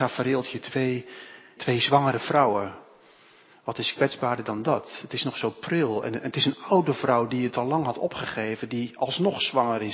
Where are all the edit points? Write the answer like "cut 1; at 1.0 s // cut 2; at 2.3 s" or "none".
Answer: cut 1; at 1.6 s